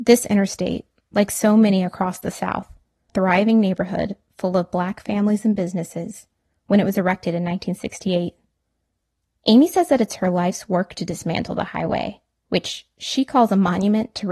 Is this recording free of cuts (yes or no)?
no